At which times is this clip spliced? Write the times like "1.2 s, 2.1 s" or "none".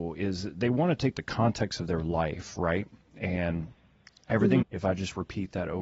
4.6 s